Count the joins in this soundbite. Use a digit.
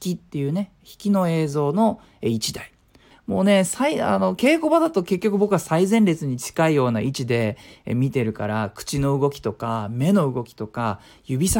1